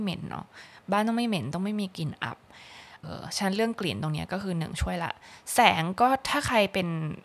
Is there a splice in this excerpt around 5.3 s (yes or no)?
no